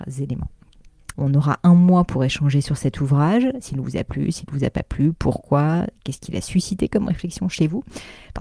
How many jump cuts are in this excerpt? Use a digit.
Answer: 1